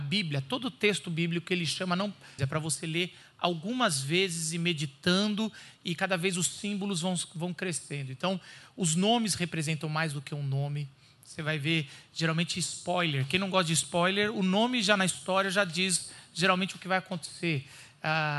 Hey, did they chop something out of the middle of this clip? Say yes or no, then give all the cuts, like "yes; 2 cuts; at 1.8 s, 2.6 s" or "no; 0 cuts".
yes; 1 cut; at 2.4 s